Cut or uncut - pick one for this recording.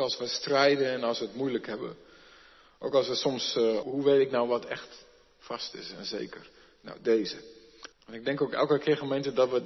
cut